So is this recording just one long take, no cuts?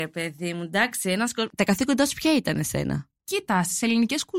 no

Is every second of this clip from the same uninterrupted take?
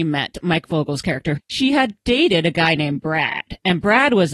no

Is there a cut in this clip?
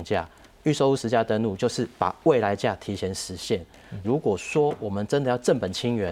yes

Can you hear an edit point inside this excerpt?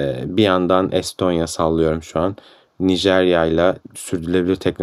no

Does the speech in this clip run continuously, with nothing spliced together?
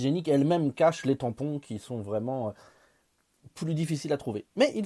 no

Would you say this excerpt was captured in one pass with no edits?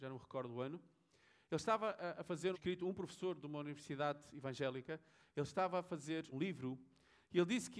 no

